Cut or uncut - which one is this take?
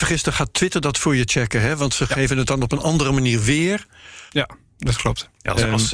cut